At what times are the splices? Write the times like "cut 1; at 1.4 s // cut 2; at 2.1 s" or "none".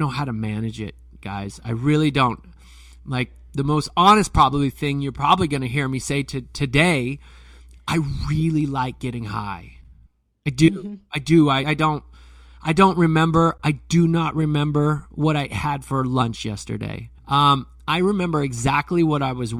cut 1; at 11.6 s // cut 2; at 17.2 s